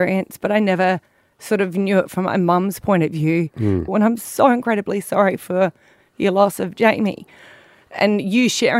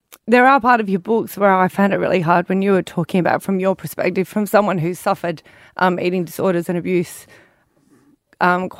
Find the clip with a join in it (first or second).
first